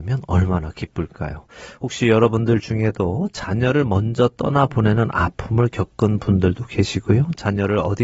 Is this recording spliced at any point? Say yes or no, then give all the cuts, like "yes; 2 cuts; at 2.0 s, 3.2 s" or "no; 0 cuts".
no; 0 cuts